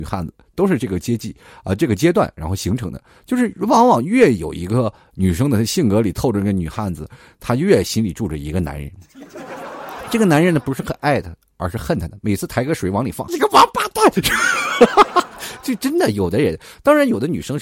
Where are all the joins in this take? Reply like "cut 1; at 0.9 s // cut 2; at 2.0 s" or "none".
cut 1; at 13.3 s